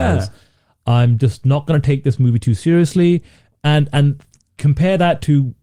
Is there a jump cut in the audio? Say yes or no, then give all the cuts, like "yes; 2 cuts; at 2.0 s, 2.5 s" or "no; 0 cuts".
no; 0 cuts